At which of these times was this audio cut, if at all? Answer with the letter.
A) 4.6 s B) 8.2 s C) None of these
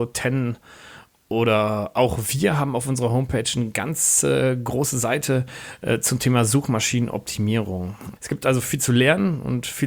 B